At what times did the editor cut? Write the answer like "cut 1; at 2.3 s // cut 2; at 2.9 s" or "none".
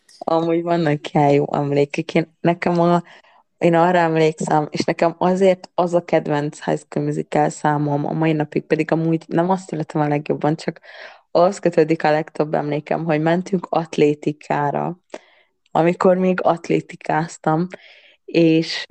none